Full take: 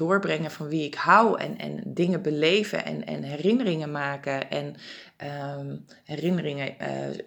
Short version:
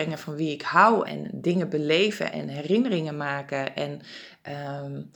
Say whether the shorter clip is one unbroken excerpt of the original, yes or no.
no